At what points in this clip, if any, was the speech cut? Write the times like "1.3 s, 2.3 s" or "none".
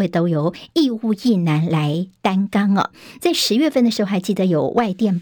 3.2 s